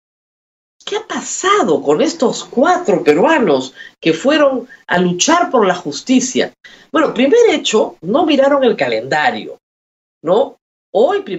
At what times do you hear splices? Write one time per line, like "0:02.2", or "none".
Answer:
none

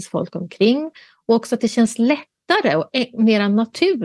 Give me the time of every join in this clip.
none

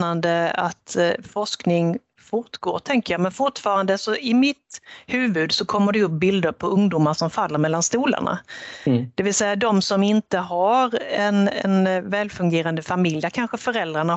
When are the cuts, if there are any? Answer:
none

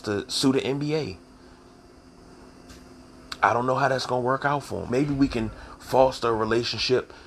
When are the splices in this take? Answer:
0:04.9

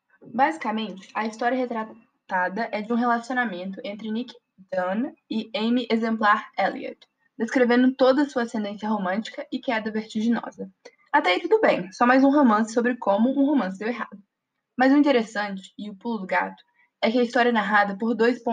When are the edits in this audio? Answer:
none

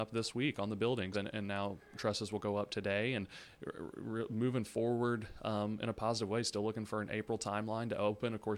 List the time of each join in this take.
0:01.1

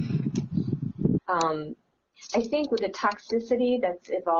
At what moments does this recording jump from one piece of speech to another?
0:01.2

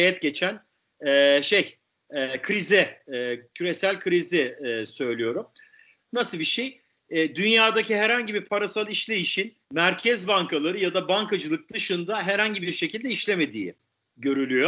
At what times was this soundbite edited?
0:06.0
0:09.6

